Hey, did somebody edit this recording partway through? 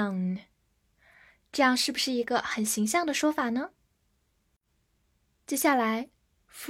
no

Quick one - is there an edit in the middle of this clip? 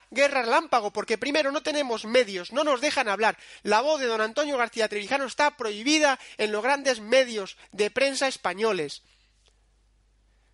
no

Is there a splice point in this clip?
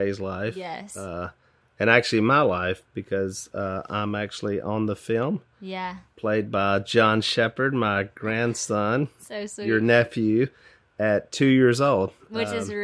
no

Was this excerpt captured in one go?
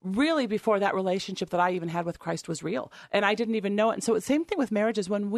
yes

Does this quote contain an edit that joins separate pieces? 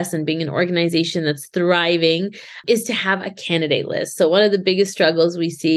no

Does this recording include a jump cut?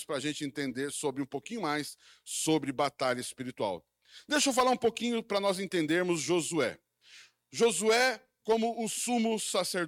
no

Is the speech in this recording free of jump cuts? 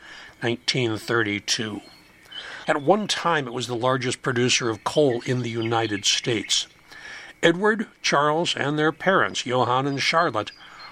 no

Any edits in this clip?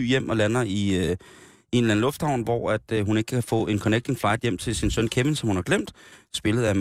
no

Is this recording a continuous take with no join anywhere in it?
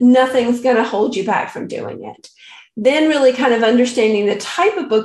yes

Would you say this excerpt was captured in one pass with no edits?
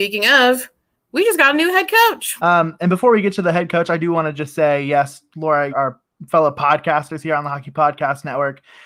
no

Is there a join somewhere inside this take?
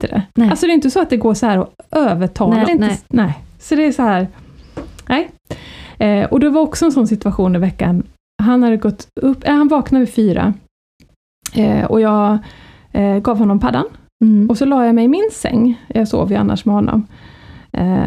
yes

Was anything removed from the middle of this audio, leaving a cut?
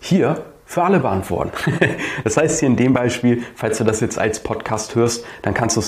no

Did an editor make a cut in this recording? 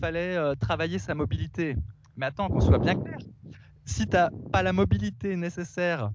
no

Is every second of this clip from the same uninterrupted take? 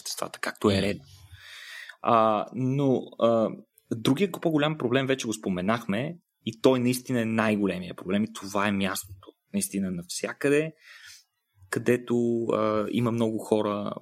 yes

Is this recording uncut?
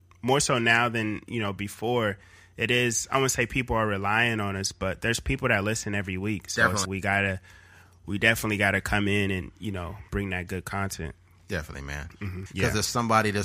no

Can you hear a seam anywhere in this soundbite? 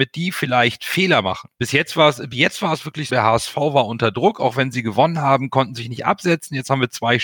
yes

